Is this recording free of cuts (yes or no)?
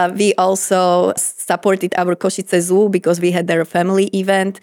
no